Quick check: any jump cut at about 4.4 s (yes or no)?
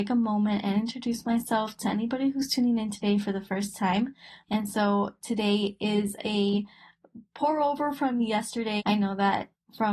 yes